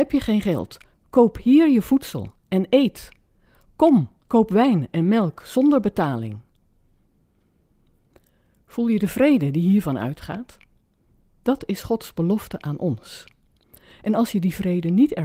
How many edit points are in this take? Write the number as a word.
one